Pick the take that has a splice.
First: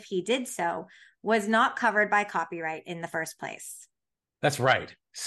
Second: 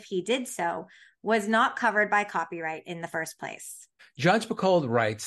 second; 1 cut; at 4.0 s

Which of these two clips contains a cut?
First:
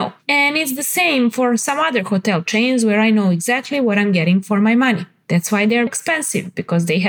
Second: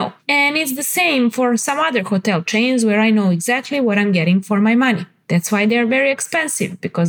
first; 1 cut; at 5.9 s

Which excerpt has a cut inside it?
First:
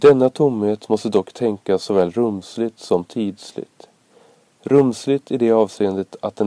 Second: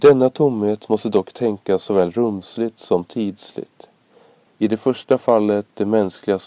second; 1 cut; at 4.5 s

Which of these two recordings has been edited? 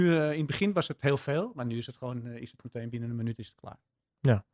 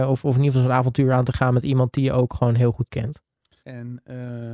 second; 1 cut; at 3.6 s

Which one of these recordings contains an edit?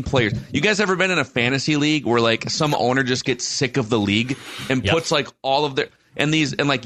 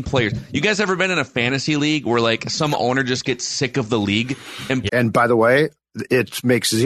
second; 1 cut; at 4.9 s

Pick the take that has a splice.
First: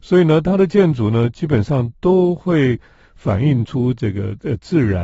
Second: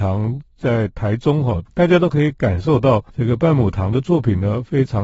second; 2 cuts; at 1.7 s, 3.1 s

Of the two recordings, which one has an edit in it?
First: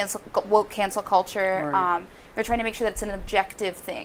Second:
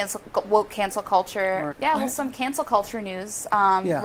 second; 1 cut; at 1.7 s

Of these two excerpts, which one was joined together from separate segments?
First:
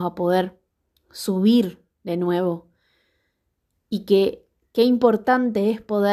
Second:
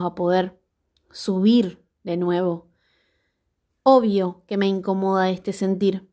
second; 1 cut; at 3.7 s

